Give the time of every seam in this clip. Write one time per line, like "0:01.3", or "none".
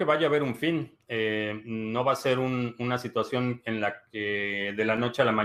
none